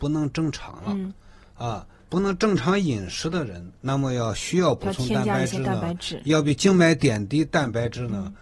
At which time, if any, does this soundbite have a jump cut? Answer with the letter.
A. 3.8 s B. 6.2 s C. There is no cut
A